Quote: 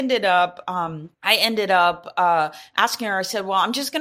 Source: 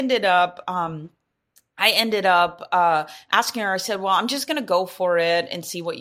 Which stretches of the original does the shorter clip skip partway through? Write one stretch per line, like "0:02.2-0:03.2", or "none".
0:01.1-0:01.7